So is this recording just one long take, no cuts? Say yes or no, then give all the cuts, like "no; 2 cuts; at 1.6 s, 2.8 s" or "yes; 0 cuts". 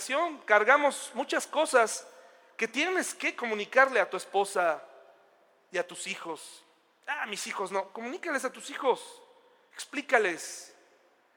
yes; 0 cuts